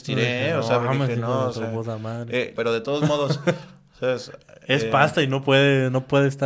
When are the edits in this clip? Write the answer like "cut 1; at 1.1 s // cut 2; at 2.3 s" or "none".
cut 1; at 2.6 s